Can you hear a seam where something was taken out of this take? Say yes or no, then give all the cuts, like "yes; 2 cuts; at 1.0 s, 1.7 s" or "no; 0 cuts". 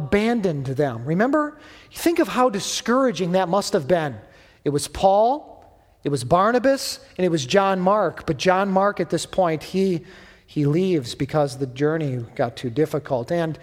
no; 0 cuts